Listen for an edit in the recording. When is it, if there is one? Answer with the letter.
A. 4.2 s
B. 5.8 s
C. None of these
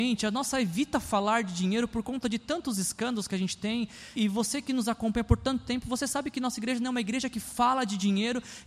A